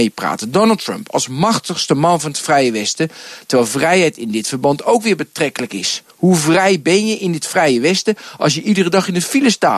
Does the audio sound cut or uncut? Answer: uncut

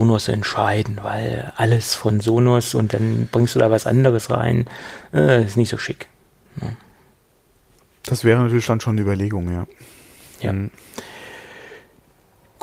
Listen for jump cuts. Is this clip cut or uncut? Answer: uncut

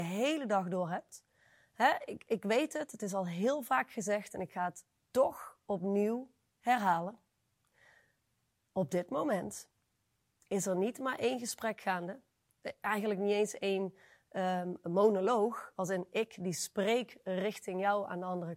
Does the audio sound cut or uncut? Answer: uncut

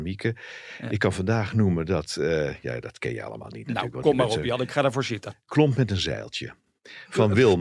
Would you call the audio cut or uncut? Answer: uncut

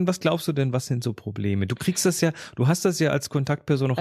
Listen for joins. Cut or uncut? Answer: uncut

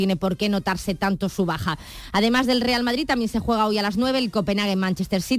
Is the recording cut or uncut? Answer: uncut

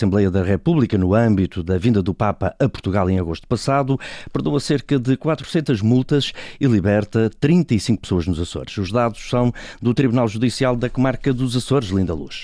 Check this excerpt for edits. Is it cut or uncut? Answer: uncut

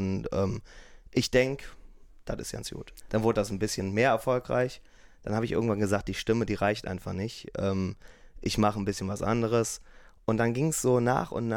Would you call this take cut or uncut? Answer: cut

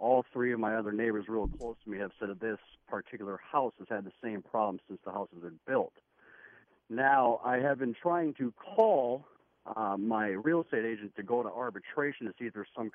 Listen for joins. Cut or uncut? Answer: uncut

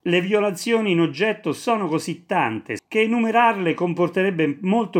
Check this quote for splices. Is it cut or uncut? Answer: cut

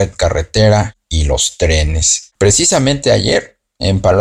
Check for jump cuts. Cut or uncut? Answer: cut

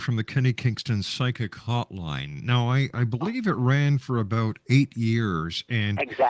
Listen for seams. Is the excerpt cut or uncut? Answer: uncut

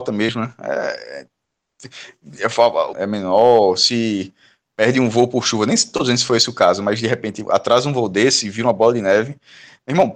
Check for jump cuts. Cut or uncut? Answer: cut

